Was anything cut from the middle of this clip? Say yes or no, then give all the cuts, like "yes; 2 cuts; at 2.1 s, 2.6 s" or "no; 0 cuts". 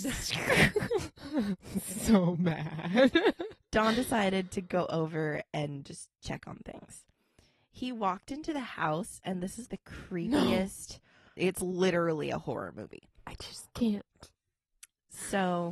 yes; 3 cuts; at 9.7 s, 11.4 s, 13.1 s